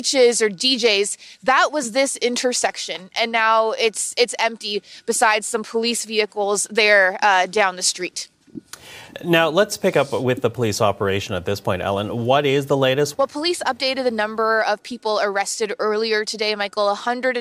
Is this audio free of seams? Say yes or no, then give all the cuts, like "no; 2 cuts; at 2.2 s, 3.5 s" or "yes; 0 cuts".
no; 1 cut; at 13.1 s